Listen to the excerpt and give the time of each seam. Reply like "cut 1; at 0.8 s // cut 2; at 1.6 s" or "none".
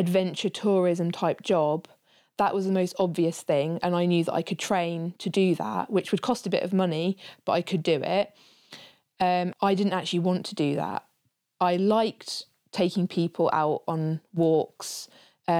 cut 1; at 9.5 s